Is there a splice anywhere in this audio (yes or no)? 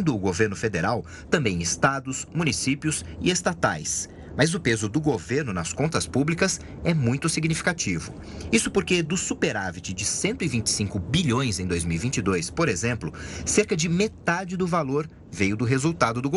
no